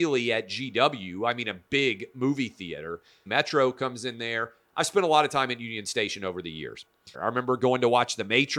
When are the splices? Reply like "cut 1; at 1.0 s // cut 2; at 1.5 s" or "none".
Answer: cut 1; at 3.3 s // cut 2; at 7.1 s